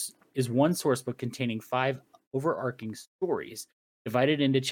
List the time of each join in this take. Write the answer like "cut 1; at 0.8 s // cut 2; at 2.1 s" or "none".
none